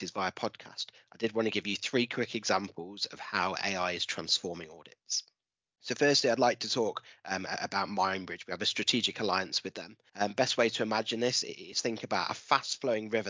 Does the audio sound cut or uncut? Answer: cut